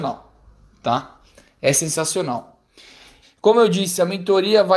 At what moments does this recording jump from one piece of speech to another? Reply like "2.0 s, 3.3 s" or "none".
3.2 s